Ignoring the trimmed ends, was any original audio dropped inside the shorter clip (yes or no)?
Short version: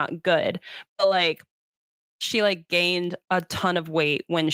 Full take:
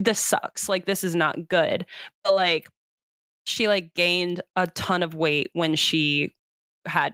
no